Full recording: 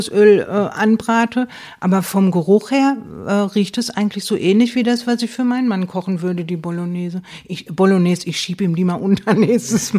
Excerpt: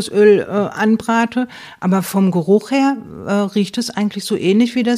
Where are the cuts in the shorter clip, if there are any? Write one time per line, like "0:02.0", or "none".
none